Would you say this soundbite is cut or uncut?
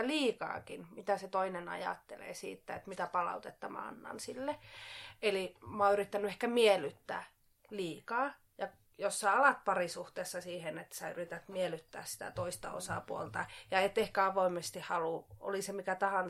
uncut